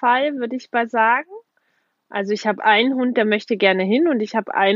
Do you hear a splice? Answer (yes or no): no